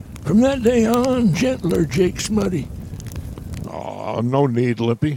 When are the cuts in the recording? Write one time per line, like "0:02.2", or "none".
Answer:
0:01.3
0:03.6